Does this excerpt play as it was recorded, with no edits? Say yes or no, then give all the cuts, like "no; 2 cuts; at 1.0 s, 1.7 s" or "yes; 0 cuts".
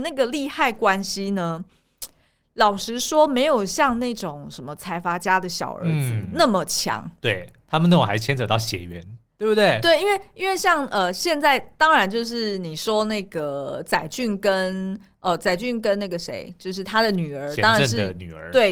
yes; 0 cuts